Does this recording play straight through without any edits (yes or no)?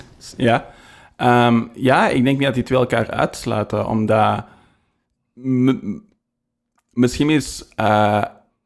yes